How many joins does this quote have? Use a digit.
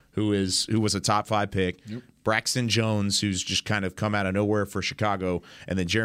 0